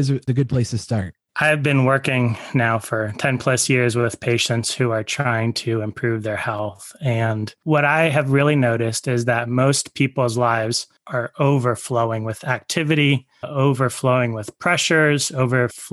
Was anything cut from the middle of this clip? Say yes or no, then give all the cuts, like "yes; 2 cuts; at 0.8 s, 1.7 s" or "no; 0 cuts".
no; 0 cuts